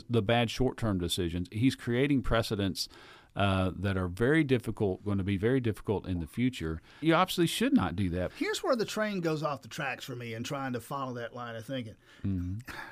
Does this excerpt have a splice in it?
yes; 2 cuts; at 7.0 s, 8.3 s

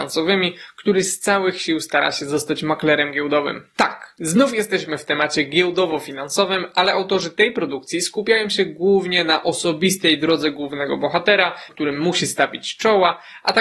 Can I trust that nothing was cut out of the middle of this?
no; 1 cut; at 11.7 s

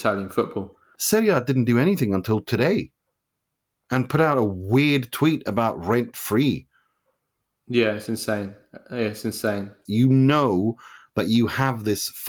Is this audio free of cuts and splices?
no; 2 cuts; at 1.0 s, 9.9 s

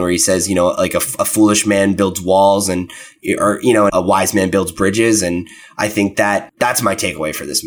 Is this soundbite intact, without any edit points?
no; 2 cuts; at 3.9 s, 6.5 s

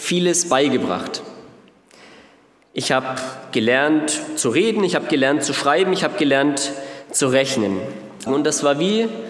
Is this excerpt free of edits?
no; 1 cut; at 8.3 s

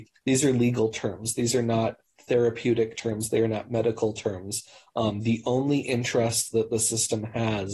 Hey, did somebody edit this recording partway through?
no; 0 cuts

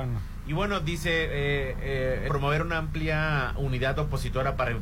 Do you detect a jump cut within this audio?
yes; 1 cut; at 2.3 s

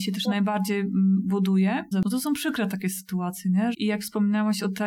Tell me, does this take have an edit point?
yes; 2 cuts; at 1.9 s, 3.7 s

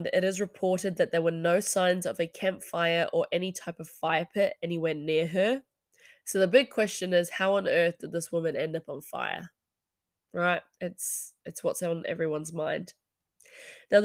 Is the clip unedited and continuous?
no; 1 cut; at 11.4 s

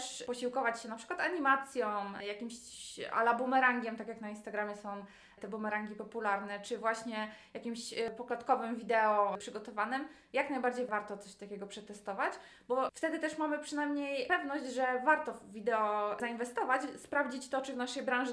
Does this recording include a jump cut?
no; 0 cuts

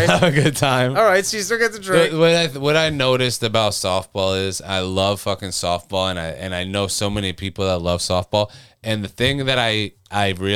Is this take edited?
no; 0 cuts

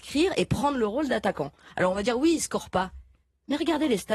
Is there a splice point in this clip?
no; 0 cuts

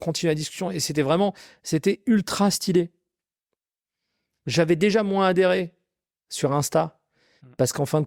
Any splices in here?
no; 0 cuts

